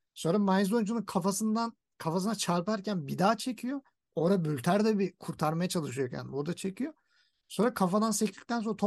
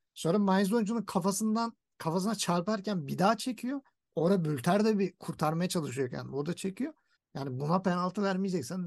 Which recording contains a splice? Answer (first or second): second